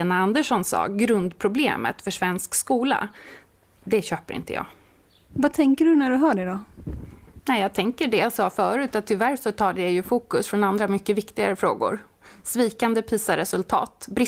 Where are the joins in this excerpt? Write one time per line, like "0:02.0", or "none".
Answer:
none